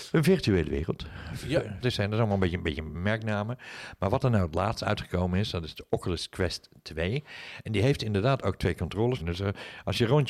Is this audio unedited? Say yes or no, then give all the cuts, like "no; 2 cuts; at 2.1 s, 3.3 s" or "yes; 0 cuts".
no; 2 cuts; at 1.8 s, 9.2 s